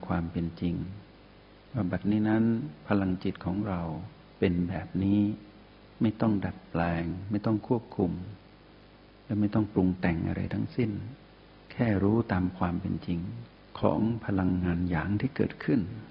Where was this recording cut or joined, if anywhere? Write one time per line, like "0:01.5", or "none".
none

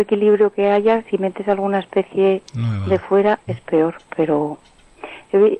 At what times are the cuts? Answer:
0:03.5

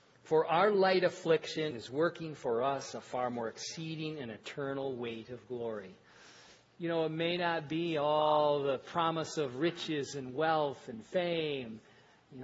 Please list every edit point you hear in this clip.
0:01.7

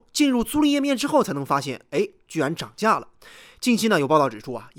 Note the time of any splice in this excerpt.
none

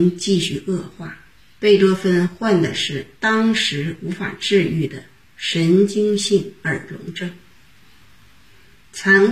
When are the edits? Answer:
0:01.5
0:03.1

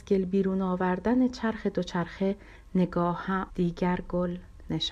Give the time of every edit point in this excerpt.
0:03.5

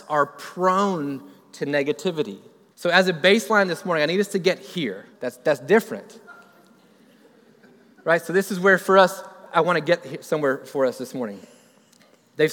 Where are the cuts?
0:02.7
0:05.1
0:09.5

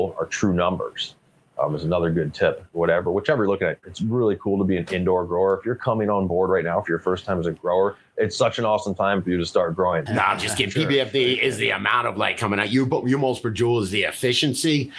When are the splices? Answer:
0:03.8
0:10.1

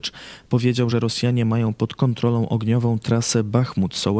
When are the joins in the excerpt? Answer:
none

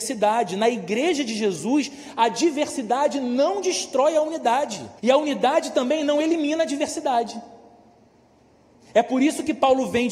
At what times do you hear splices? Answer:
0:05.0

